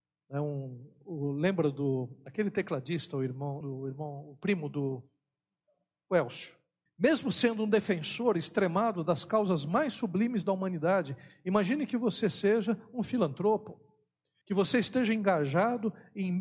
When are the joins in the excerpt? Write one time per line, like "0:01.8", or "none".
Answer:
0:03.6
0:06.9
0:14.4